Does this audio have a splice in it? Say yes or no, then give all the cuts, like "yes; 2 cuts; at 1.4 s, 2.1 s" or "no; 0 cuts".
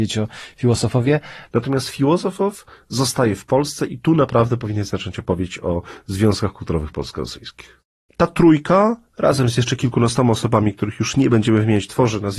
yes; 2 cuts; at 1.5 s, 8.1 s